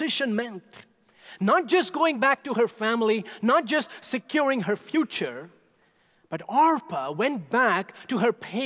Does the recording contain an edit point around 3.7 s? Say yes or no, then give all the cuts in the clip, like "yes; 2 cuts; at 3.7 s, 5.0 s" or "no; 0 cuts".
no; 0 cuts